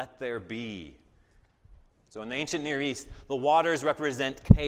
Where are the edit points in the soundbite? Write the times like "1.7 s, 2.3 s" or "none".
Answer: 1.9 s